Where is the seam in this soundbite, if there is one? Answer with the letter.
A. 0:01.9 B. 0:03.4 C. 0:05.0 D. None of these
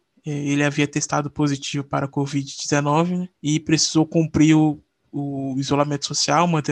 B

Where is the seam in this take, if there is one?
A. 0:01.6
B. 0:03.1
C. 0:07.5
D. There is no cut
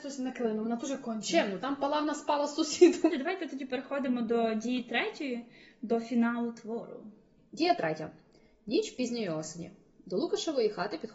B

